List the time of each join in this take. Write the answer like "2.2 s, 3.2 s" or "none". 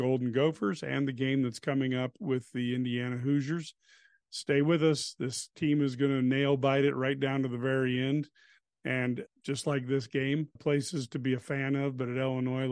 9.3 s, 10.6 s